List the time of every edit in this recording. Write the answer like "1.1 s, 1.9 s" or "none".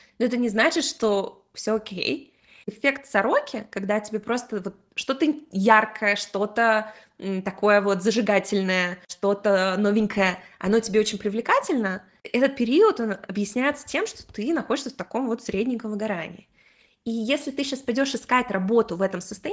none